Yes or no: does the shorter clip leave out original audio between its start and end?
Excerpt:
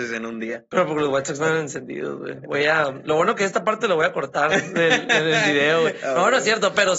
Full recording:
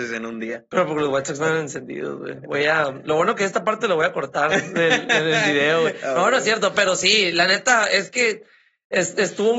no